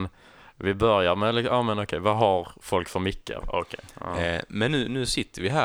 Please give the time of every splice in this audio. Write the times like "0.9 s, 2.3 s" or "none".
3.4 s